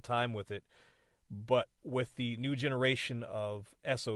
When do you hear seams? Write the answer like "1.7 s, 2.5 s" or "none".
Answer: none